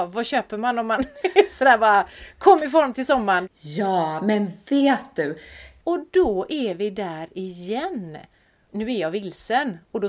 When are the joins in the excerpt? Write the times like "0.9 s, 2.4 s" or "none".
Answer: 3.5 s, 5.8 s, 8.7 s